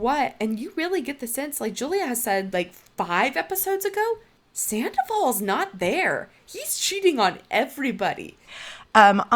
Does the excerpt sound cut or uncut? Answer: cut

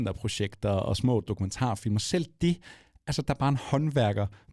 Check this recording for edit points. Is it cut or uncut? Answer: uncut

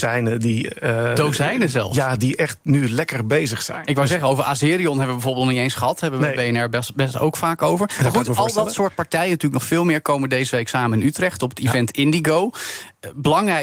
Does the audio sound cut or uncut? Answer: uncut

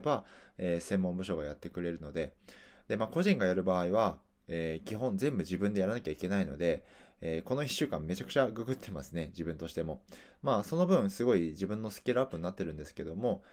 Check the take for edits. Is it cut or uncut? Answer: uncut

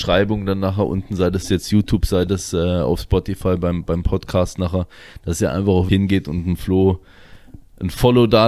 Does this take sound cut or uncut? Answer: cut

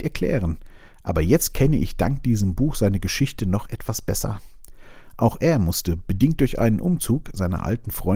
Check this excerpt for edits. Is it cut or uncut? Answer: uncut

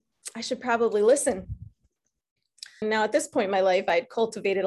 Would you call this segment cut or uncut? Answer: cut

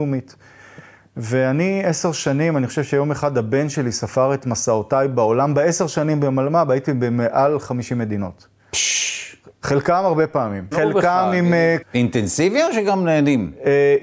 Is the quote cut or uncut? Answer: cut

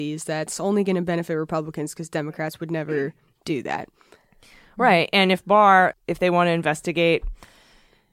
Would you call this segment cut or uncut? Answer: cut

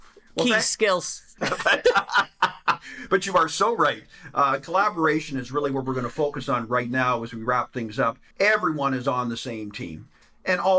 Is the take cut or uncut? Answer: cut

